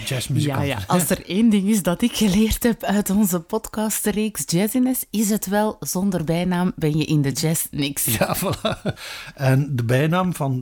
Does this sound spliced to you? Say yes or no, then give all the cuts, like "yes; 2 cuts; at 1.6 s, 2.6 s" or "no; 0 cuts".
no; 0 cuts